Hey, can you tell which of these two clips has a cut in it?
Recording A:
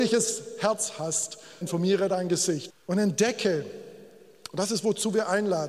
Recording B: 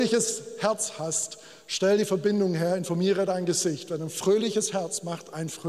A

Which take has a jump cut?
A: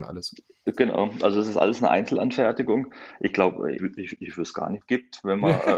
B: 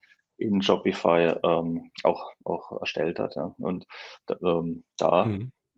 A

